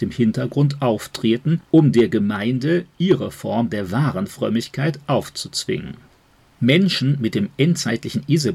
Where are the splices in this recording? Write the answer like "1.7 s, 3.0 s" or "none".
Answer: none